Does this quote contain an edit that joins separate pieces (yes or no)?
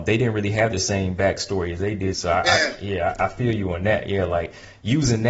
yes